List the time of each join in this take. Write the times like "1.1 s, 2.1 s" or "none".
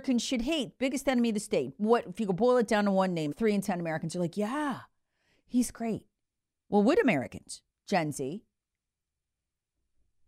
3.3 s